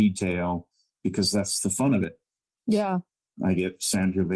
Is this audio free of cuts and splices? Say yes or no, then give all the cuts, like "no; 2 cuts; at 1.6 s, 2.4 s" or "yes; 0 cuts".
no; 1 cut; at 3.2 s